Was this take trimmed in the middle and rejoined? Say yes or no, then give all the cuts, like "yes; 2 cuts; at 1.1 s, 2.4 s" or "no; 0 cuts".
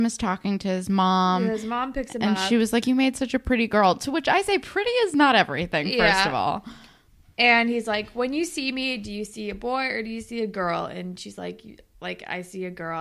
no; 0 cuts